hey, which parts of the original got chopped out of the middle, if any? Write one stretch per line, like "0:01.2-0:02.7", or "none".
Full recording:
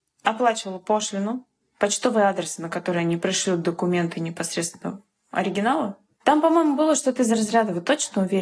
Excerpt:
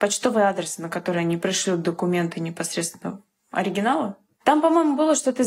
none